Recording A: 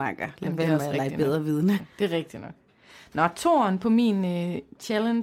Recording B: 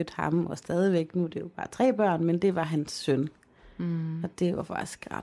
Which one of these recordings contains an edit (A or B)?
A